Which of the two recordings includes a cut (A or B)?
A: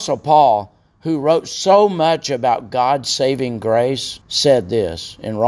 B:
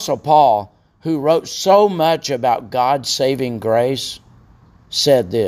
A